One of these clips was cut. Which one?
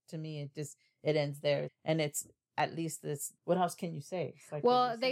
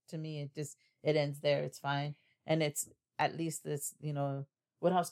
first; 2 cuts; at 1.6 s, 3.3 s

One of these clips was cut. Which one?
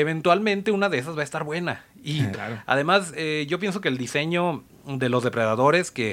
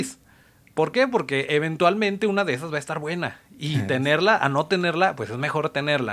first; 1 cut; at 2.3 s

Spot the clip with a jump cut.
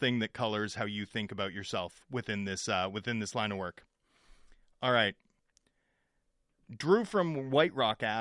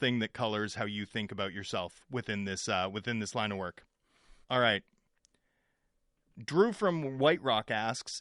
second; 1 cut; at 4.4 s

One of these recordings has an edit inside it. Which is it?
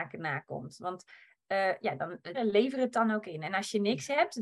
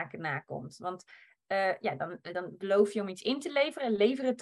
first; 1 cut; at 2.3 s

